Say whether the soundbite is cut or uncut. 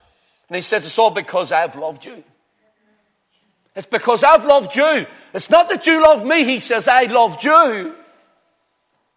uncut